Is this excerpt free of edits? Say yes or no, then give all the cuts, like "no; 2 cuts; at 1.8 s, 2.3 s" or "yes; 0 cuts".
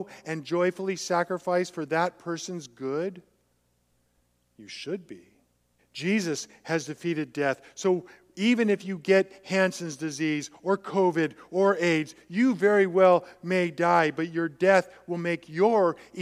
no; 1 cut; at 5.8 s